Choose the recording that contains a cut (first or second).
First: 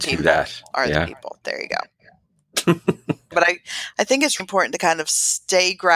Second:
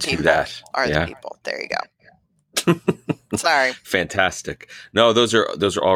first